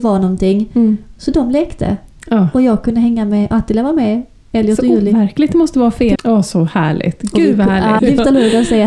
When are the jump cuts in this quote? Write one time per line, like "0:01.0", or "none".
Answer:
0:06.1
0:08.0